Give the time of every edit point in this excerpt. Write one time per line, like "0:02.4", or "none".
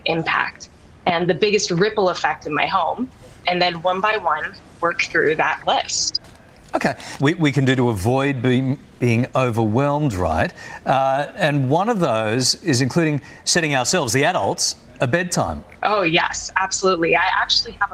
0:07.2
0:15.8